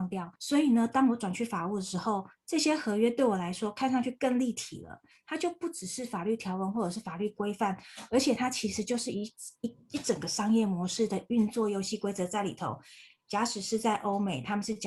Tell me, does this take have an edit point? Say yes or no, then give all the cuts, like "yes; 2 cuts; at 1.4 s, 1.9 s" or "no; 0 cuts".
no; 0 cuts